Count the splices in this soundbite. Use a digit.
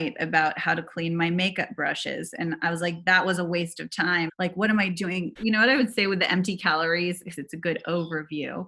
3